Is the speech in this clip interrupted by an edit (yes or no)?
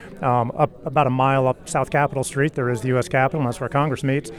no